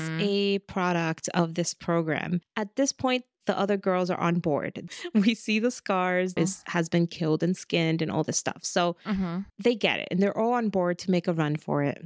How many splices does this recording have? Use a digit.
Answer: 3